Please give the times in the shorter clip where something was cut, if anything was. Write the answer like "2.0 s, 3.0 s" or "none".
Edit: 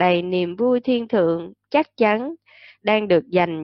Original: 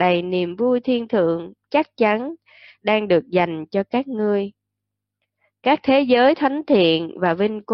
none